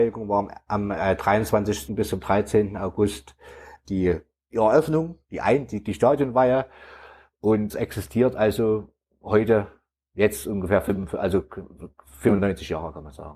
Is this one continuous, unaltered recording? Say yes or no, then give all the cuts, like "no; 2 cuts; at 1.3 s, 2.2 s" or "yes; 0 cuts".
no; 1 cut; at 1.9 s